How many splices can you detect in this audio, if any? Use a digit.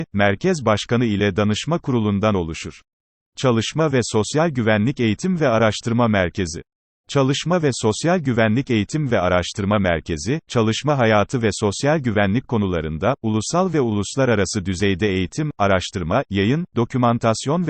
2